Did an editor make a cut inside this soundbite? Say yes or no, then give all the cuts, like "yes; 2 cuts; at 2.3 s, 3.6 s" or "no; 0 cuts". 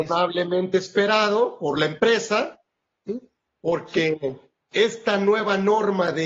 yes; 2 cuts; at 3.1 s, 4.7 s